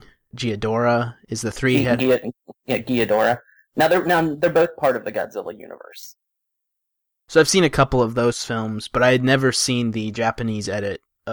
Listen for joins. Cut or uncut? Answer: uncut